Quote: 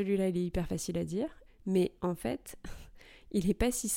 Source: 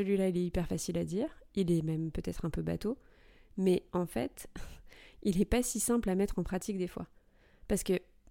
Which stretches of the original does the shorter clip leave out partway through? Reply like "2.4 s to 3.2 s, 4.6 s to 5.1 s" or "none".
1.5 s to 3.4 s